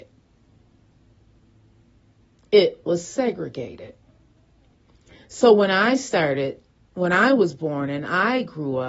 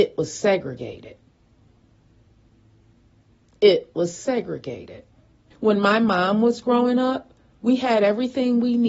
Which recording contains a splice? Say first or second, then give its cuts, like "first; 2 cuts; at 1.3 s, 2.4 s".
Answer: second; 1 cut; at 5.5 s